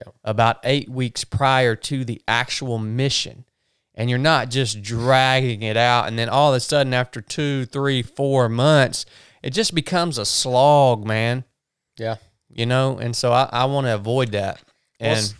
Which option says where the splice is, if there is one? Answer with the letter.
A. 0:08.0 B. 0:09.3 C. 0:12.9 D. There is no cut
D